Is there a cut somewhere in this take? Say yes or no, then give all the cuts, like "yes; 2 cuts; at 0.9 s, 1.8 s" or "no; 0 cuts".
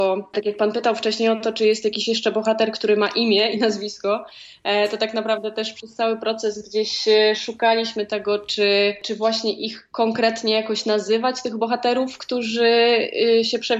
no; 0 cuts